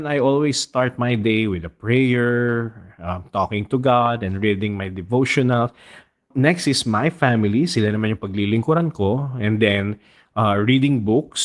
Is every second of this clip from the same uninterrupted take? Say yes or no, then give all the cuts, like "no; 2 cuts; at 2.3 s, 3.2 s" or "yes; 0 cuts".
yes; 0 cuts